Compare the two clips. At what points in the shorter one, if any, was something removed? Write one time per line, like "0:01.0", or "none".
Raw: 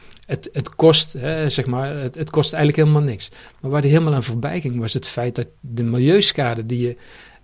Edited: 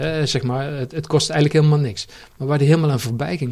none